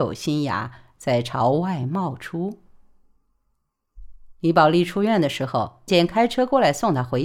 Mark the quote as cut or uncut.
cut